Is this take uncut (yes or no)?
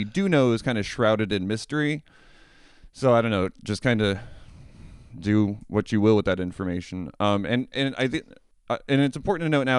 yes